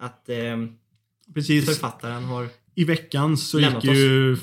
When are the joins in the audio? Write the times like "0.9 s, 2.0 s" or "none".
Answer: none